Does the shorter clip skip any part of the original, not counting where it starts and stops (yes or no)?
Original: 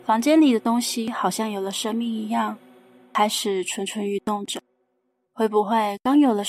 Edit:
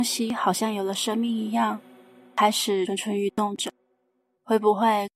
yes